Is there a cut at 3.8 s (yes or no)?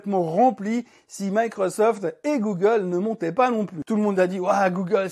yes